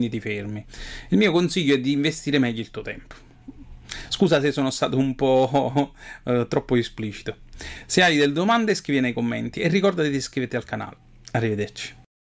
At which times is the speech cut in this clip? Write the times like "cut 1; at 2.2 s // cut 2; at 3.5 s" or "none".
none